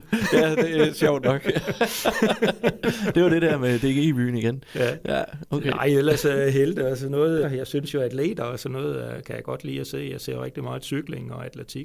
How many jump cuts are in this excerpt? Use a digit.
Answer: 1